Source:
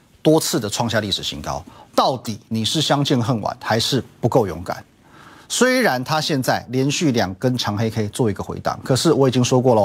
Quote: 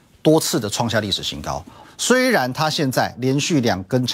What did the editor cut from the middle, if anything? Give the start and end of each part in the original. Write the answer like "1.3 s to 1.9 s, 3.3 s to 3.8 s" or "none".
1.8 s to 5.3 s